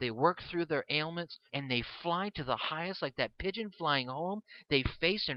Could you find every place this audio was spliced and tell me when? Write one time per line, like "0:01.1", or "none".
0:01.5